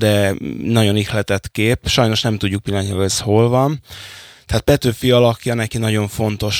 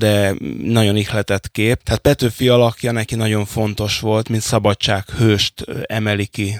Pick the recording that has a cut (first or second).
second